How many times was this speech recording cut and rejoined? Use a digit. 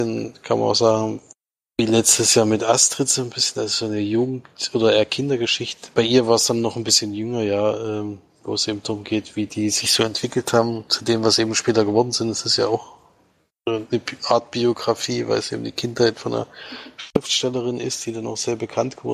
0